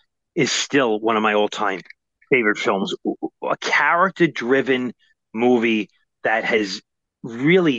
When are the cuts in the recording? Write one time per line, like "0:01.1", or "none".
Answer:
none